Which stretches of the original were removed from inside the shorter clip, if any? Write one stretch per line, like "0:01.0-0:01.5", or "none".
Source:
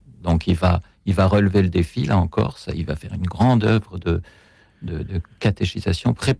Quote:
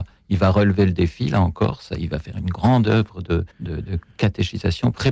0:04.3-0:04.7